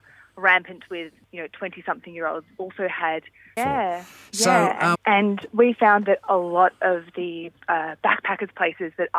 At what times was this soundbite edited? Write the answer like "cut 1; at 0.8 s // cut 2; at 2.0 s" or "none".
cut 1; at 3.6 s // cut 2; at 4.9 s